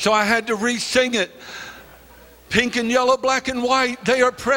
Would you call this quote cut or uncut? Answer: uncut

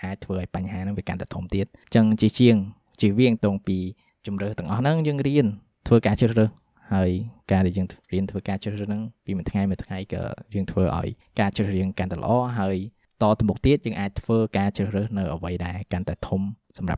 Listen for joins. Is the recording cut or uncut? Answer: cut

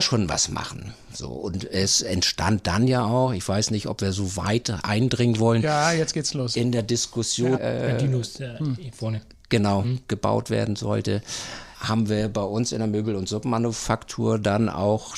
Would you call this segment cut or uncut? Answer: cut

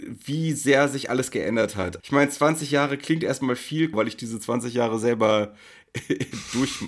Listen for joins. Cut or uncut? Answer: cut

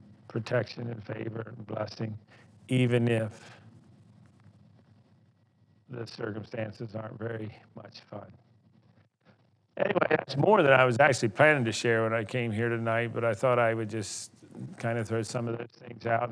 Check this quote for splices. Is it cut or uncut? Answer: uncut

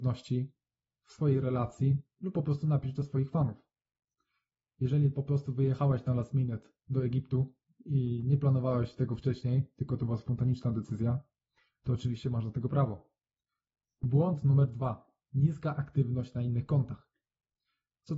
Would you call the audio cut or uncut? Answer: cut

